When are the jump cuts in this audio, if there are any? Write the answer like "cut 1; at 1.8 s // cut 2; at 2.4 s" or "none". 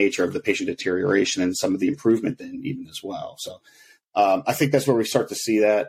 none